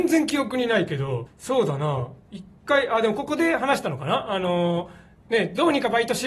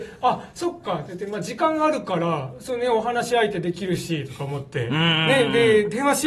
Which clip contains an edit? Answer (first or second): first